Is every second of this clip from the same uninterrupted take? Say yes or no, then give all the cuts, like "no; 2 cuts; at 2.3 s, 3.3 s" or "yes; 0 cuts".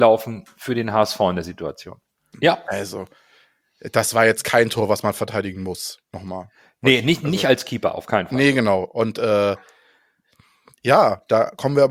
no; 1 cut; at 2.3 s